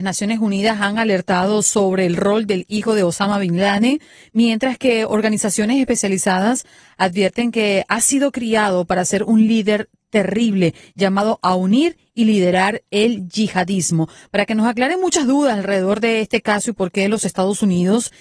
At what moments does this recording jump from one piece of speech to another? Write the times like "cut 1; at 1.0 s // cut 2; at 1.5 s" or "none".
none